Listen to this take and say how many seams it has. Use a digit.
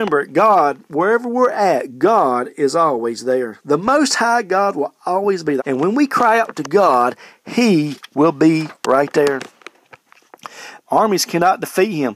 2